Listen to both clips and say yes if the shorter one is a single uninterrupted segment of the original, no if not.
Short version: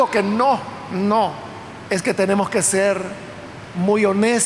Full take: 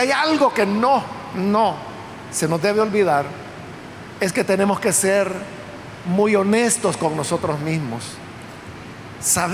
no